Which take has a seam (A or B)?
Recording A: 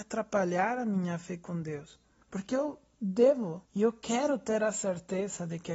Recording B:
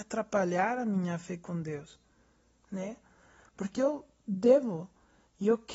A